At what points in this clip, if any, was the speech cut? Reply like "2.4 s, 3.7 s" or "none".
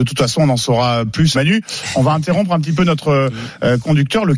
1.3 s